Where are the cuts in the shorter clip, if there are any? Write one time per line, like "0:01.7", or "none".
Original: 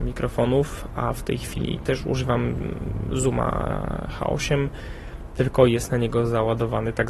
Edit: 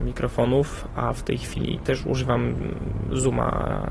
none